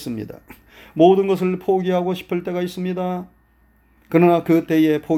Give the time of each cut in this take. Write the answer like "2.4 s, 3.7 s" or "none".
none